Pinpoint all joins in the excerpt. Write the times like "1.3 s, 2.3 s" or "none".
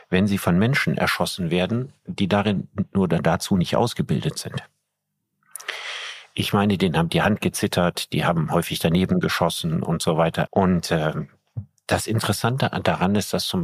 10.5 s